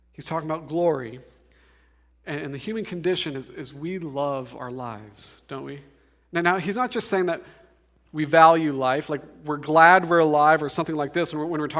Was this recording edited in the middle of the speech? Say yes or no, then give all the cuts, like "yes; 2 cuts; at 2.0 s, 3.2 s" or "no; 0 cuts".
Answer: no; 0 cuts